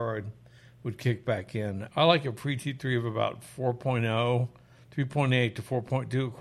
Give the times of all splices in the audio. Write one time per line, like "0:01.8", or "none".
0:01.9